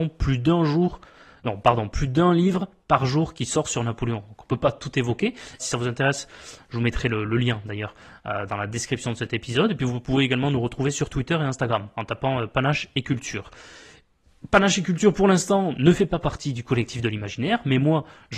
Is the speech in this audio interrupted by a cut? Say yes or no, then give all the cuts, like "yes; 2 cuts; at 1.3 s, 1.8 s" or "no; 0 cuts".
yes; 1 cut; at 5.6 s